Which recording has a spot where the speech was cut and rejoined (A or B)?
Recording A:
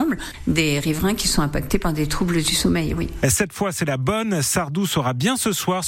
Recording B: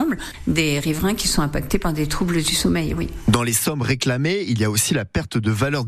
A